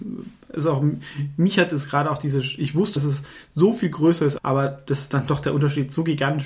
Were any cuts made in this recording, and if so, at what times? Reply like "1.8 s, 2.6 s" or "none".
3.0 s, 4.4 s